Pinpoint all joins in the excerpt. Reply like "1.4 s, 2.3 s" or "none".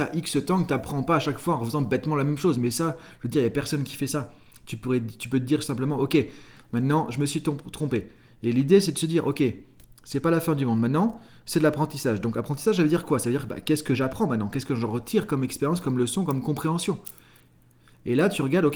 none